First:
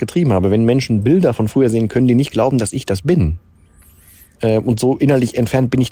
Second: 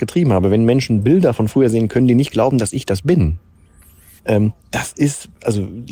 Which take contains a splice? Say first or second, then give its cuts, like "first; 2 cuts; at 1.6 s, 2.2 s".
second; 1 cut; at 4.2 s